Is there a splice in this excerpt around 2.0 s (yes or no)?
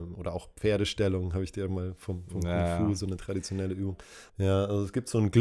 no